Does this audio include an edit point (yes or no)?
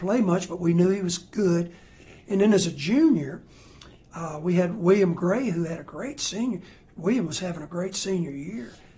yes